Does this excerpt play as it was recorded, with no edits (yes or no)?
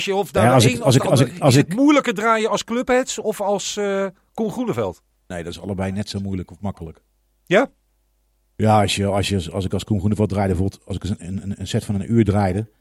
yes